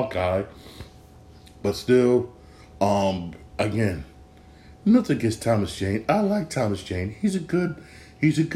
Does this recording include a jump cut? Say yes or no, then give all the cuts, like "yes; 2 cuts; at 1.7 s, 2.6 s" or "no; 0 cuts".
no; 0 cuts